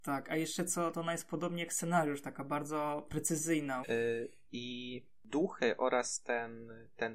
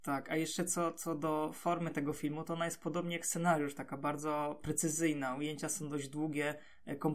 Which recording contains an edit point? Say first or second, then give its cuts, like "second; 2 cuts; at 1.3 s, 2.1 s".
first; 2 cuts; at 0.9 s, 3.8 s